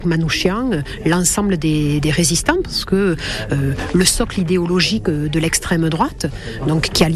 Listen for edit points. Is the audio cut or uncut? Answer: uncut